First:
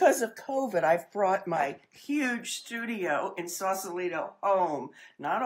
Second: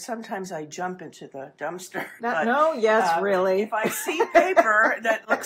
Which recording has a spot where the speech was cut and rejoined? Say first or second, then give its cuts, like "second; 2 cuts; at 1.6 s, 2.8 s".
second; 1 cut; at 2.2 s